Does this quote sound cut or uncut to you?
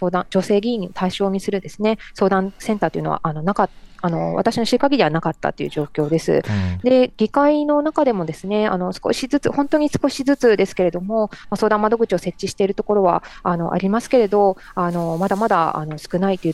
uncut